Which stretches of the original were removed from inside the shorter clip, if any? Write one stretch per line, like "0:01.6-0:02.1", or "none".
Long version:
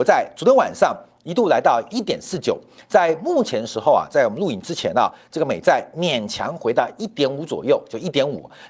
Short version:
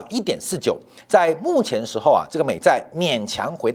0:04.1-0:05.3